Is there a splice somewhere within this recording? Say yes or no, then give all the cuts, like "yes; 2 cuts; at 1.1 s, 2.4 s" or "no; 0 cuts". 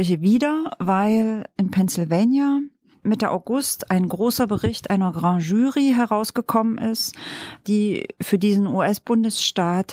no; 0 cuts